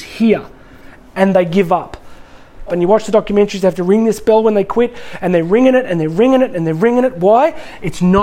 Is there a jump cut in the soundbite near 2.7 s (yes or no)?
yes